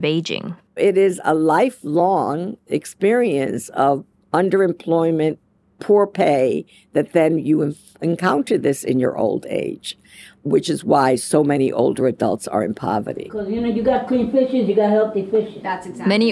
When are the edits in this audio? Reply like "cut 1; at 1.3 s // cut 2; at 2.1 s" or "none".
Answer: none

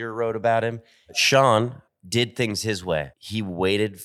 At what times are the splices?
cut 1; at 1.9 s // cut 2; at 3.1 s

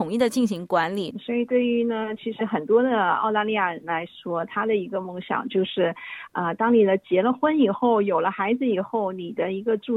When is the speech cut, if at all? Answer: cut 1; at 1.1 s

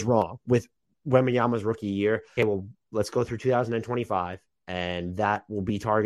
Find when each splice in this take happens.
cut 1; at 2.4 s

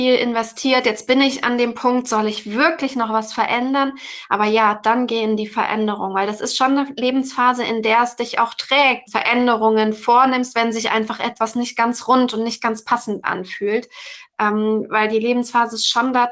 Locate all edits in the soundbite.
cut 1; at 9.1 s

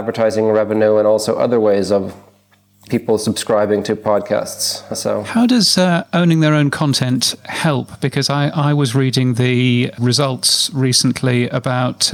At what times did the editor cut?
none

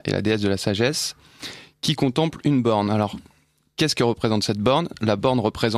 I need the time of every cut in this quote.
none

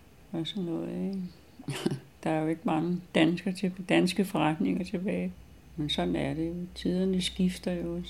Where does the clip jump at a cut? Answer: none

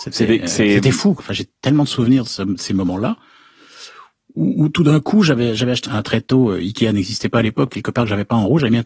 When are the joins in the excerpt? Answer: cut 1; at 1.2 s // cut 2; at 5.8 s // cut 3; at 7.7 s

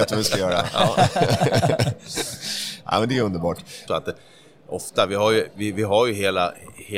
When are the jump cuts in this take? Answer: cut 1; at 3.9 s

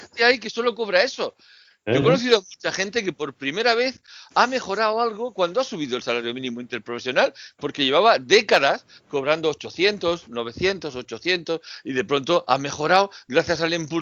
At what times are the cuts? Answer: none

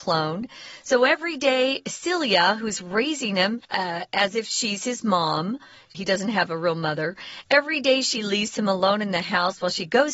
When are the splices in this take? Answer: cut 1; at 3.6 s // cut 2; at 5.9 s

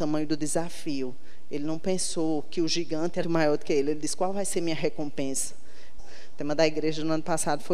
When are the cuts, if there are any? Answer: cut 1; at 3.2 s // cut 2; at 6.0 s

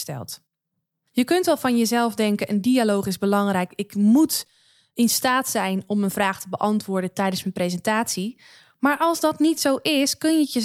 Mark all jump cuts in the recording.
cut 1; at 1.1 s

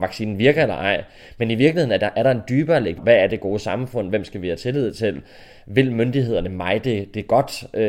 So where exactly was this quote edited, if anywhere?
cut 1; at 3.0 s

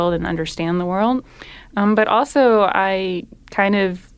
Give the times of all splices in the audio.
none

